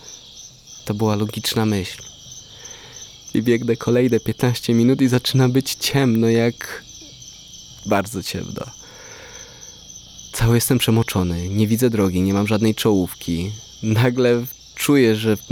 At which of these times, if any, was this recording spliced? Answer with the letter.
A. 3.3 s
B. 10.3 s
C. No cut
A